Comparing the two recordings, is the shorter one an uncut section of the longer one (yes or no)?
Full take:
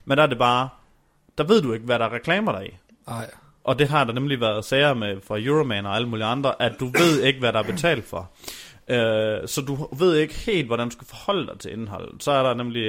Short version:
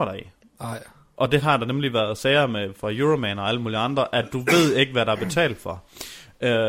yes